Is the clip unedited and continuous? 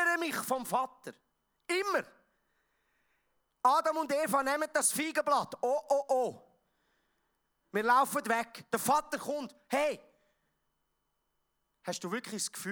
yes; 0 cuts

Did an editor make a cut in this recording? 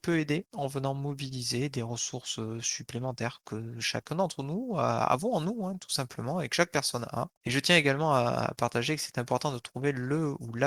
yes; 1 cut; at 7.4 s

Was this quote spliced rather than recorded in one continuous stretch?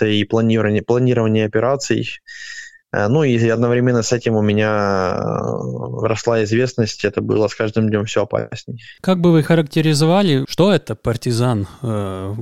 no; 0 cuts

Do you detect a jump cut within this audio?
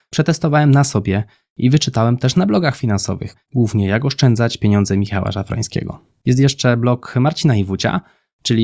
no; 0 cuts

